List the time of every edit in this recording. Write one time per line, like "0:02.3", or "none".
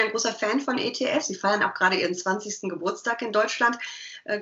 none